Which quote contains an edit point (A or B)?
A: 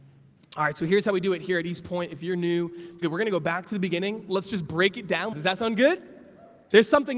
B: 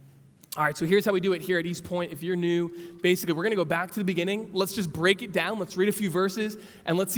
A